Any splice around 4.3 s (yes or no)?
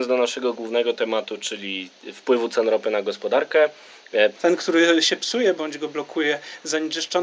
yes